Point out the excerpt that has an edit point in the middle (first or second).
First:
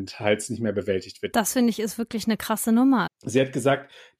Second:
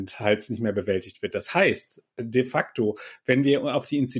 first